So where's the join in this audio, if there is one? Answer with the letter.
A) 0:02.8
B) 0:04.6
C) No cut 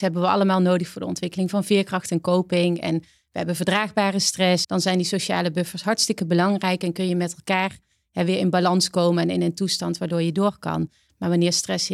B